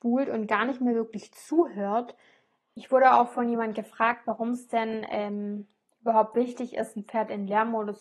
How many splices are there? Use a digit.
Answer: 1